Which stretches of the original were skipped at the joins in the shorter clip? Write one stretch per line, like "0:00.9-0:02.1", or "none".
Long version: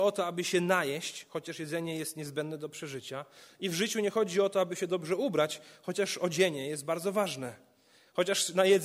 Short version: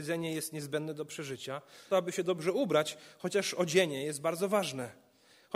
0:03.5-0:04.5